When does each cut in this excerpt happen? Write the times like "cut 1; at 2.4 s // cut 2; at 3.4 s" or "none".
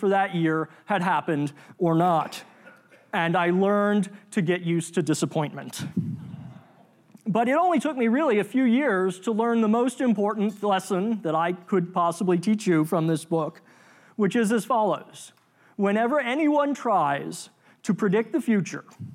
none